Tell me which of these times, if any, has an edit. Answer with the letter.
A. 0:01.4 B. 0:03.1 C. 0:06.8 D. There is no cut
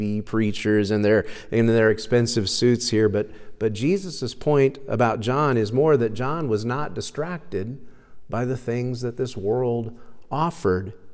D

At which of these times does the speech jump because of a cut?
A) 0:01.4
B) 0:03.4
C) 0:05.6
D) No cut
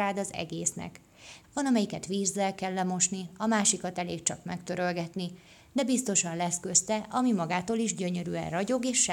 A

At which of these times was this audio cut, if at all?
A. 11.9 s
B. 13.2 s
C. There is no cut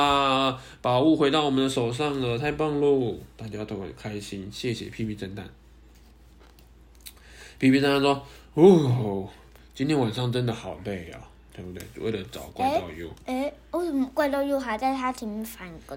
C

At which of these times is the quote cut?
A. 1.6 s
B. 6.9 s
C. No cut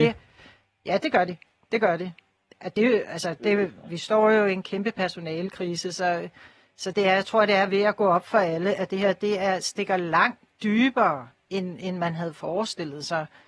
B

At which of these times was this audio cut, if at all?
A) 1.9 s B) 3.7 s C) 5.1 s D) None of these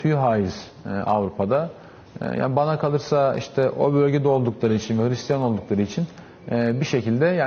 D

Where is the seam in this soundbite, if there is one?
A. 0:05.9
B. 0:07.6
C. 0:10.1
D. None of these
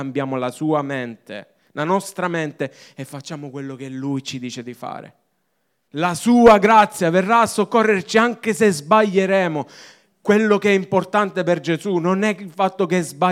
A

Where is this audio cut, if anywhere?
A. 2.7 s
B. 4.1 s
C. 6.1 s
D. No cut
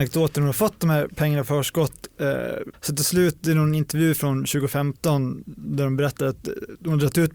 A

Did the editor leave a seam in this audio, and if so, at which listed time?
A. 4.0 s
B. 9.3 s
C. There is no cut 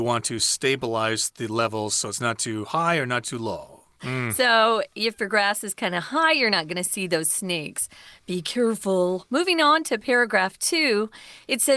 A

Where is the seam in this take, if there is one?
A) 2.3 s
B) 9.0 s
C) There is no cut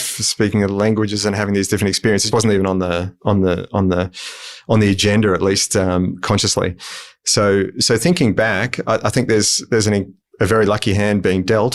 A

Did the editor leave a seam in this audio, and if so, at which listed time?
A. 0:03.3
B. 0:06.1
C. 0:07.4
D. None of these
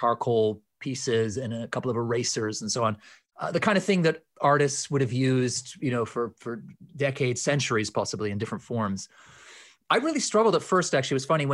D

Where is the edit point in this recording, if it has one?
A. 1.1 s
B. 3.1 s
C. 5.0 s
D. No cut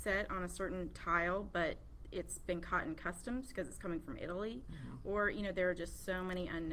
D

